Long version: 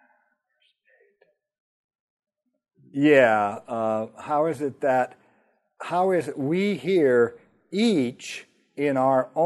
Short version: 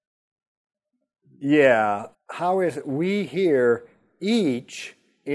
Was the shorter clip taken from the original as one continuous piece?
no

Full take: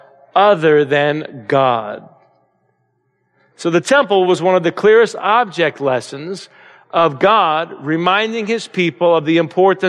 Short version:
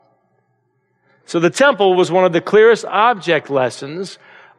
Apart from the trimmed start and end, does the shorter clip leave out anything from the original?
no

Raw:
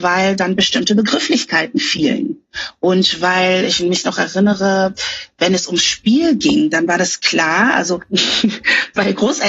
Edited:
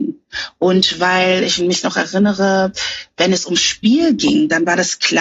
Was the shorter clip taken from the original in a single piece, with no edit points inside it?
yes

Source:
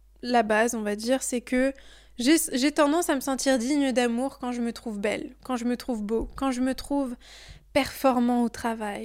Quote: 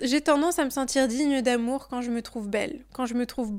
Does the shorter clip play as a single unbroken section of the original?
yes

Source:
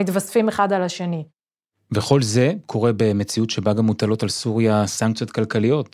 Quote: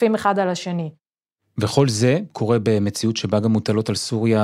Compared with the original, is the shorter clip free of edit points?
yes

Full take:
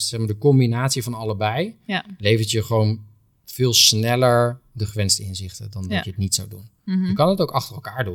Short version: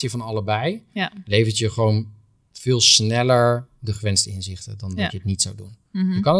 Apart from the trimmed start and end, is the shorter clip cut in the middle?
no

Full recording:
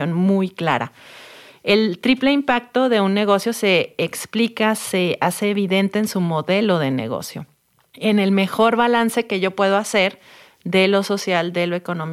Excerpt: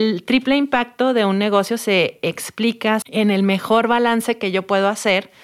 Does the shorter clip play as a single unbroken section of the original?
no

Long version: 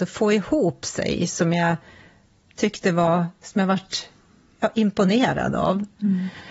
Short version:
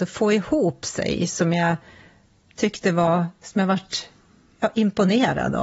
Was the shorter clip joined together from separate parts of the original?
no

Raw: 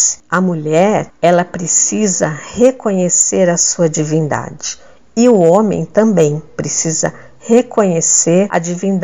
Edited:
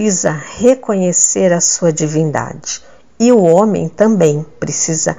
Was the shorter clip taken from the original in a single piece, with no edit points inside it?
yes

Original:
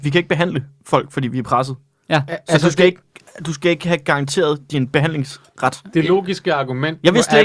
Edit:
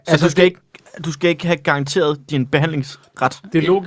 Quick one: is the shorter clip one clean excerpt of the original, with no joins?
yes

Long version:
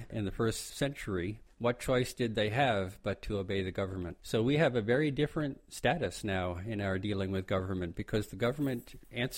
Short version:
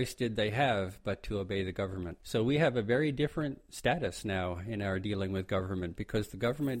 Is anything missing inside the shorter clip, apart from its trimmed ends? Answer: no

